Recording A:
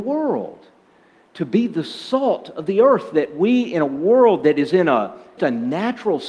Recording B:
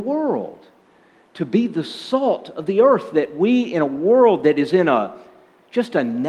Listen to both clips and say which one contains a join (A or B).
A